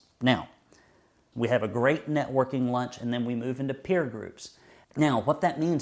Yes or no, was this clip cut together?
yes